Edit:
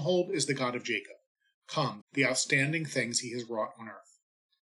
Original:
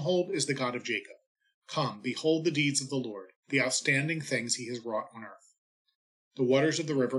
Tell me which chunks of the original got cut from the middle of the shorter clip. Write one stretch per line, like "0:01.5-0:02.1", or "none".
0:02.0-0:03.4